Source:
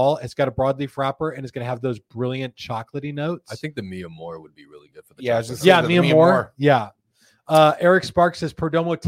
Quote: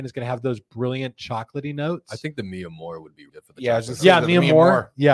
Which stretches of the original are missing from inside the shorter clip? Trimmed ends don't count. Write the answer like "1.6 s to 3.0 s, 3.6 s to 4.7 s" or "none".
4.7 s to 4.9 s

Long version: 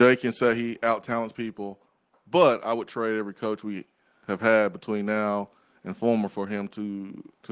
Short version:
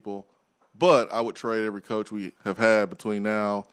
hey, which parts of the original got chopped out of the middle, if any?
3.9 s to 4.2 s

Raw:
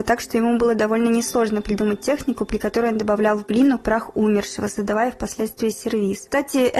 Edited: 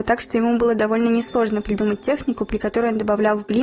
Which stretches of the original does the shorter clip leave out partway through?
none

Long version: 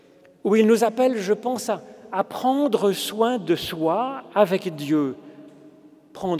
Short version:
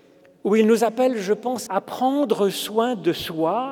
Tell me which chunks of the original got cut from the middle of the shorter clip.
1.7 s to 2.1 s

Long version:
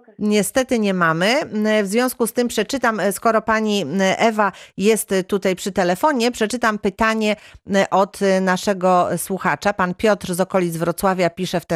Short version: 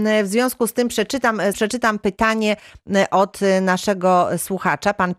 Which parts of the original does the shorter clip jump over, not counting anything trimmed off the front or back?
3.1 s to 6.3 s

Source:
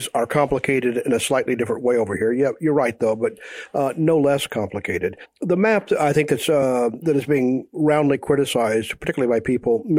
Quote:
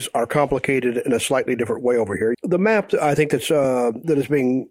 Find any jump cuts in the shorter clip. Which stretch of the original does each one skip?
2.3 s to 5.3 s

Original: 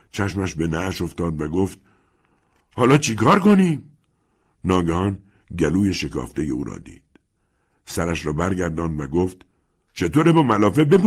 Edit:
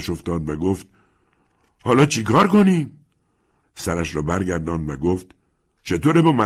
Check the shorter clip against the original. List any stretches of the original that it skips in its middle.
4.5 s to 7.7 s

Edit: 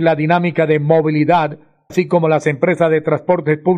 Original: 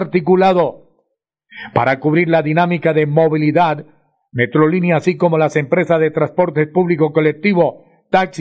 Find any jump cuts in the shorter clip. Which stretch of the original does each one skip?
4.2 s to 5.0 s

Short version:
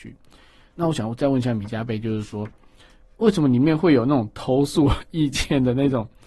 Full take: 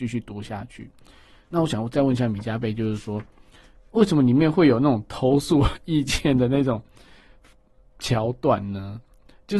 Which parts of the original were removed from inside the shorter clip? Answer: none

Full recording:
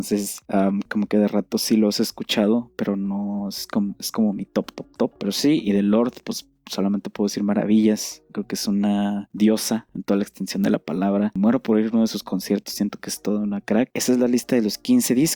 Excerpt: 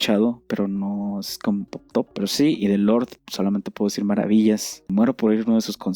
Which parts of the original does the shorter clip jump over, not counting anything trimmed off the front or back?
4.0 s to 4.7 s, 6.2 s to 6.6 s, 8.3 s to 11.3 s

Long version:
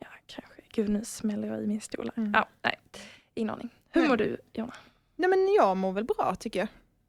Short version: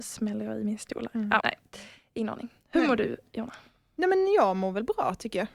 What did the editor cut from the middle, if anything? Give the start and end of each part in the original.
2.4 s to 2.6 s

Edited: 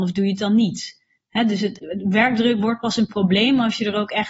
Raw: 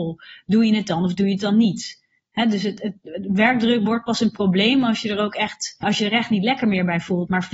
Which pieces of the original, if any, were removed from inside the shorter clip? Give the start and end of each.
2.8 s to 3.0 s

